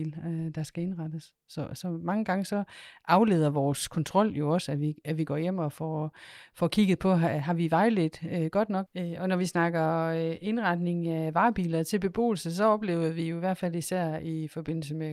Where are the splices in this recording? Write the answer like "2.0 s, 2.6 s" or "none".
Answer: 8.9 s